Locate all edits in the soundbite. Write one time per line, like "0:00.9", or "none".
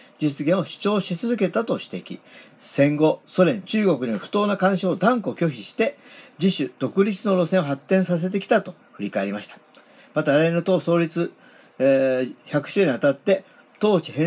none